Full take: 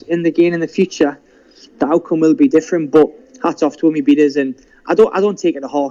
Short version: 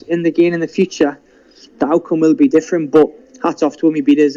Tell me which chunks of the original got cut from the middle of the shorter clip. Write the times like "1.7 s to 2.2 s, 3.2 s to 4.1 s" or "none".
none